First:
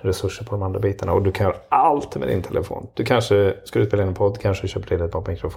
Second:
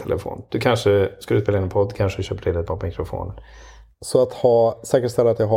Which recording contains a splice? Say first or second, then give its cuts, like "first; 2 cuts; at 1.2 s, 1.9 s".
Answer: second; 1 cut; at 3.9 s